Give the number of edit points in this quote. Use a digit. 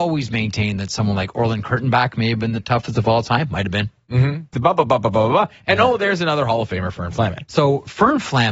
2